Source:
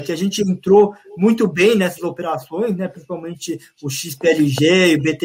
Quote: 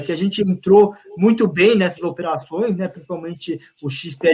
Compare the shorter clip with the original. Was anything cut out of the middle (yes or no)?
no